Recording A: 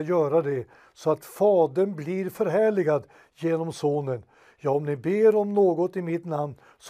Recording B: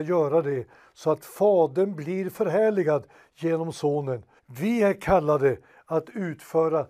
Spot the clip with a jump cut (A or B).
B